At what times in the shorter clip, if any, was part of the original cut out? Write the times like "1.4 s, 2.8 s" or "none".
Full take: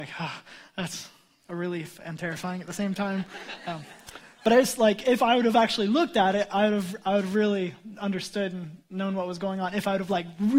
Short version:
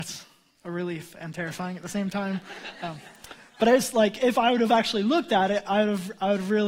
none